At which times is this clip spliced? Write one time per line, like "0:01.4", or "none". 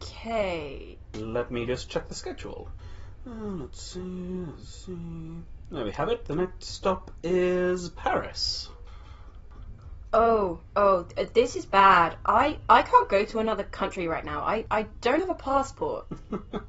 0:01.1
0:15.2